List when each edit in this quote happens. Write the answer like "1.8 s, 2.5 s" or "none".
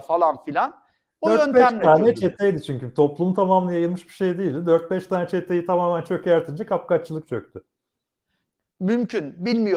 none